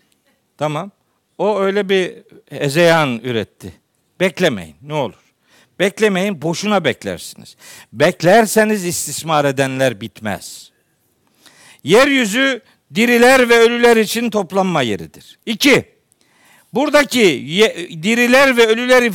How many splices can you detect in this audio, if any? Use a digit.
1